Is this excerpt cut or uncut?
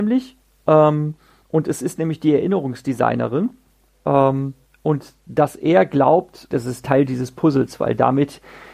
cut